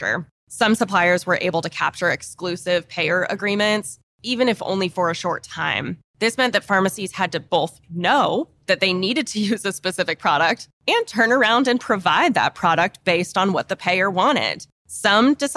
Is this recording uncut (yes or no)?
yes